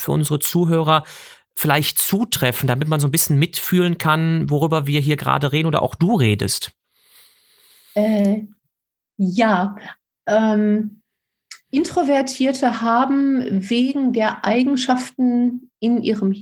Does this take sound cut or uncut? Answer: uncut